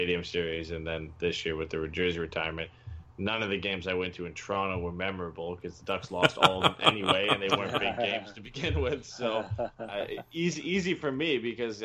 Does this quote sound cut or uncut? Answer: uncut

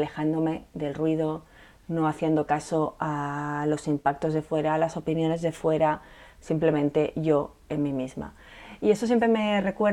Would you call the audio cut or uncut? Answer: uncut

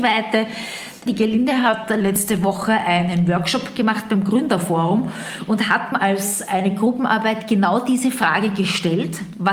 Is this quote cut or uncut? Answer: cut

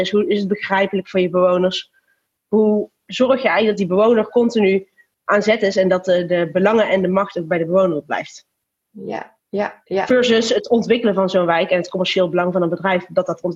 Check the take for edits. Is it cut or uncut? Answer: uncut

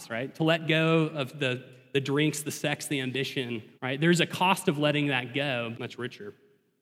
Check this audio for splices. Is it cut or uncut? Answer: cut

